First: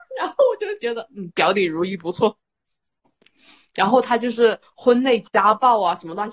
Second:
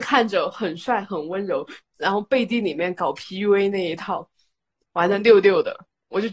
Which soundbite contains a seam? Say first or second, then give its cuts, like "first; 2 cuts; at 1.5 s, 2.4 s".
first; 1 cut; at 3.0 s